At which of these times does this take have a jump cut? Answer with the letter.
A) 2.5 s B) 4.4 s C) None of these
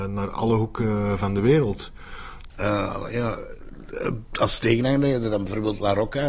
A